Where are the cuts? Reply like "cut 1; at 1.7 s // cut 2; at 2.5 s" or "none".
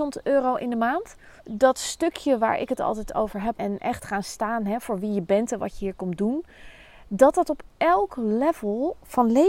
cut 1; at 1.4 s // cut 2; at 3.5 s

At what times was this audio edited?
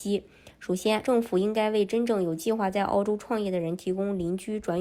cut 1; at 1.0 s

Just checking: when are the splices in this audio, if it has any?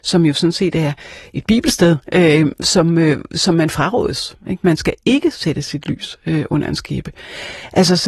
none

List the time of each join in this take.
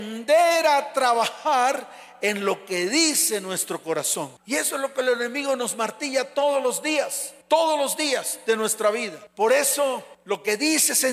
cut 1; at 4.4 s

